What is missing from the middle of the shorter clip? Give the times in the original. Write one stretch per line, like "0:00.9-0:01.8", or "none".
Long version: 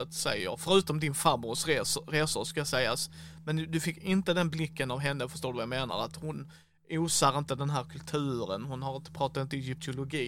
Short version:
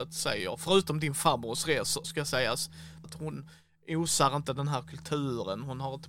0:02.0-0:02.4
0:03.4-0:06.1